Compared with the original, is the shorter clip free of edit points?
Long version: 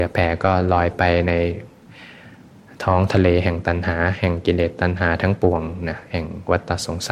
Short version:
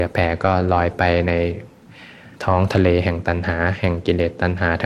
no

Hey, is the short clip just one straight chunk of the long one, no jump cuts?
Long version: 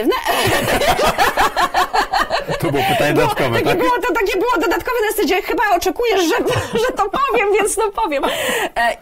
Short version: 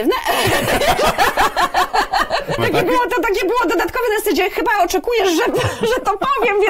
no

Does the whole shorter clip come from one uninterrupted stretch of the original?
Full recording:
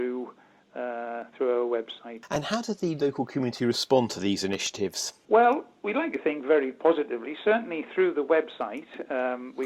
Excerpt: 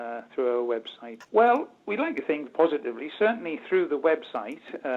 no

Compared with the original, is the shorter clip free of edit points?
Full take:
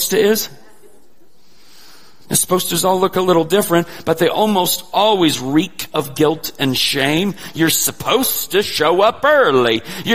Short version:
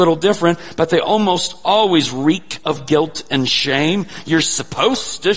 yes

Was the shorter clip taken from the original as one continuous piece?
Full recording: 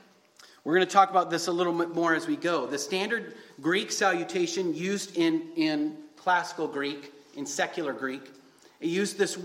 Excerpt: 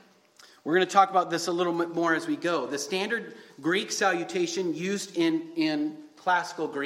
yes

